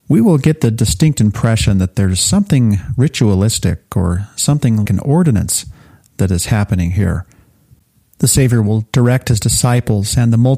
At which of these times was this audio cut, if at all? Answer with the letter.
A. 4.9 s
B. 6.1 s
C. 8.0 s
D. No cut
A